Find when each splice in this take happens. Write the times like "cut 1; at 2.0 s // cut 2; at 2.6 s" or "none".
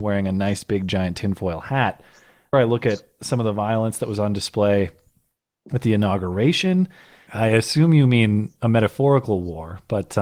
cut 1; at 2.5 s // cut 2; at 7.3 s